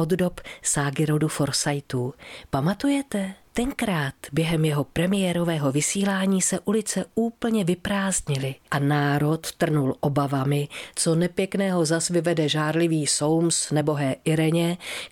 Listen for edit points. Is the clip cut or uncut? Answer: uncut